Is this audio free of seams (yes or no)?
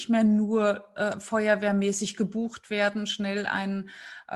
yes